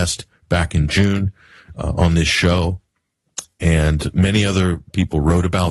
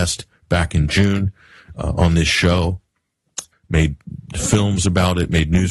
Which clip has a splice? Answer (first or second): second